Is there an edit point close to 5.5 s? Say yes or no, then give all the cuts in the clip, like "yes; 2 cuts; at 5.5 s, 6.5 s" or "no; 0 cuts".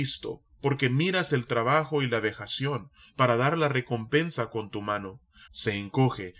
yes; 1 cut; at 5.5 s